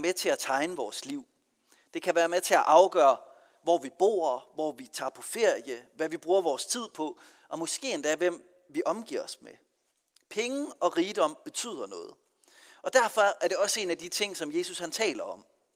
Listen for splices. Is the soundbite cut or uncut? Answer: uncut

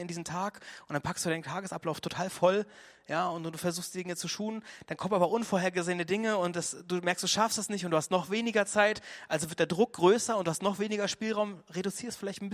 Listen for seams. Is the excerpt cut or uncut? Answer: uncut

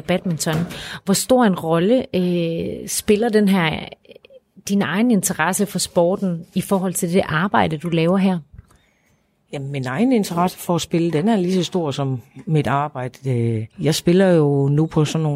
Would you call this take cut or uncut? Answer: cut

